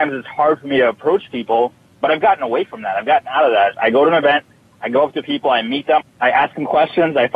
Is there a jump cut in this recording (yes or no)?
yes